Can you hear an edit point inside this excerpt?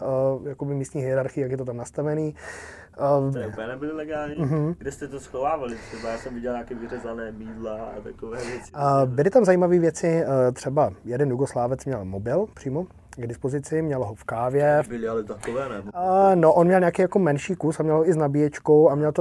yes; 1 cut; at 3.3 s

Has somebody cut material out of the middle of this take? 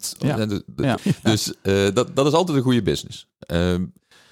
yes; 1 cut; at 1.0 s

